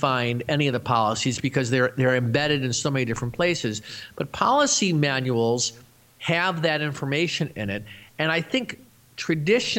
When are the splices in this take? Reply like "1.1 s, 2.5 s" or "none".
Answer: none